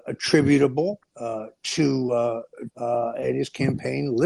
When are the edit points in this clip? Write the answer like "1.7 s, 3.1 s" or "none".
1.1 s, 2.7 s